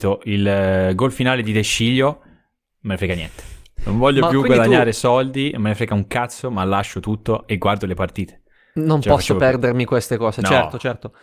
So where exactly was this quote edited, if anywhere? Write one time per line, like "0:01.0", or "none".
0:02.7